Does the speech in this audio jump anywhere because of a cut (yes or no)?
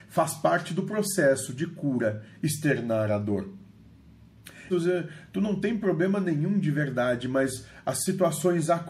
yes